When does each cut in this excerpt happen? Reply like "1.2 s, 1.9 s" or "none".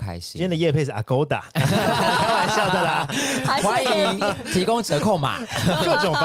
none